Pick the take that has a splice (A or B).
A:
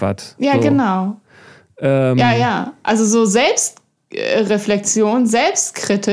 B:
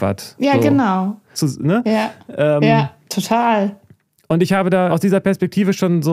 B